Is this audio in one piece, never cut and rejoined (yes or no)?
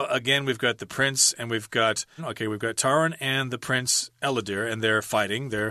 no